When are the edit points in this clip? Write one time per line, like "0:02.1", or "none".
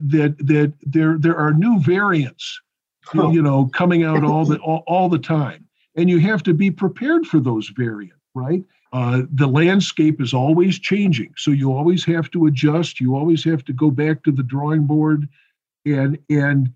0:08.8